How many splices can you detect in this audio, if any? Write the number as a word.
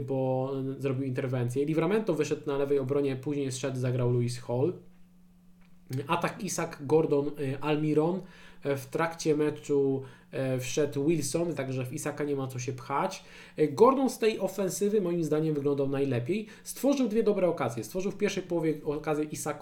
one